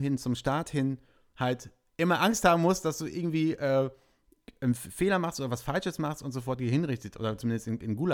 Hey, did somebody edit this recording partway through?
no; 0 cuts

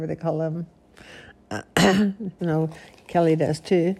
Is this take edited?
yes; 1 cut; at 2.4 s

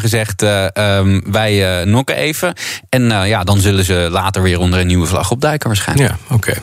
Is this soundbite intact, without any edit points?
yes; 0 cuts

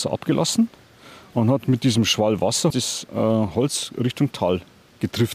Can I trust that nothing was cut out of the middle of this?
no; 1 cut; at 2.7 s

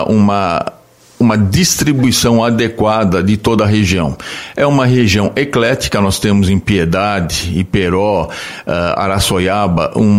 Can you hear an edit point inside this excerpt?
no; 0 cuts

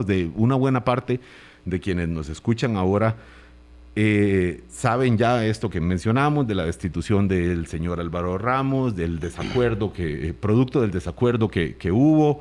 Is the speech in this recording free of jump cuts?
yes; 0 cuts

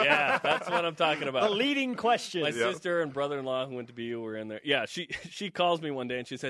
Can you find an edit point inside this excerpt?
no; 0 cuts

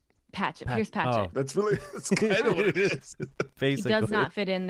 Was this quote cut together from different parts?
yes; 1 cut; at 1.3 s

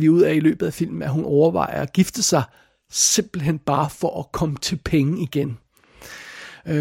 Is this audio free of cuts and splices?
yes; 0 cuts

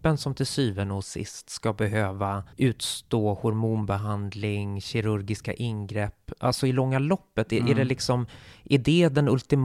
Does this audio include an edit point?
yes; 1 cut; at 2.5 s

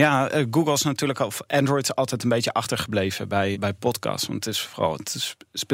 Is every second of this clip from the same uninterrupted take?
no; 1 cut; at 3.5 s

